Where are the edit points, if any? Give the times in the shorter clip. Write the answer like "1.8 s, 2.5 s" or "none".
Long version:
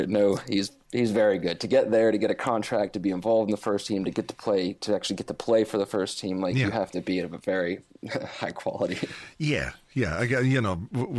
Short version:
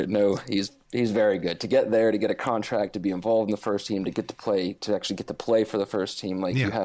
none